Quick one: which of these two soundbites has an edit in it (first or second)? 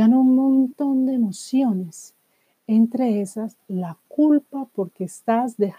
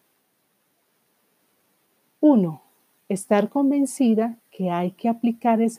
second